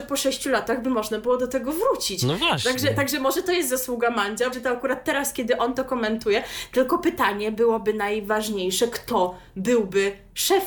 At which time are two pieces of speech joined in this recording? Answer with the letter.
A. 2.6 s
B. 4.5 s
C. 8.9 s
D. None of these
B